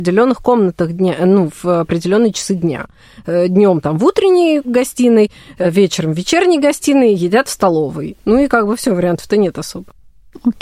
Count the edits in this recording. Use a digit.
0